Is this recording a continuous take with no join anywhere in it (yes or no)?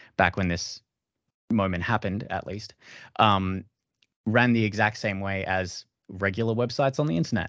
yes